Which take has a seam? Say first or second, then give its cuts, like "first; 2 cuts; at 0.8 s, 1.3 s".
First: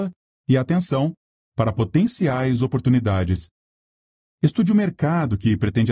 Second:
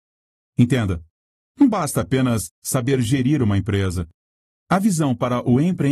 second; 1 cut; at 4.6 s